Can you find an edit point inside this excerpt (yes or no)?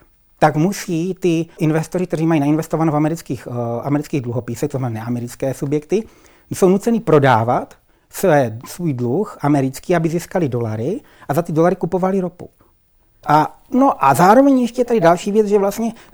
yes